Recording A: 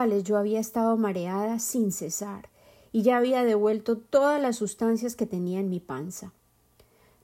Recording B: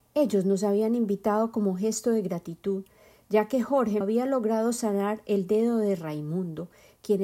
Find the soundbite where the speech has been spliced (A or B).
B